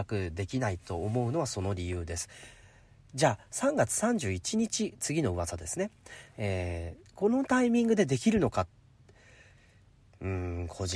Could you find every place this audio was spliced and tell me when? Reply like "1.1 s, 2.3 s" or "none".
none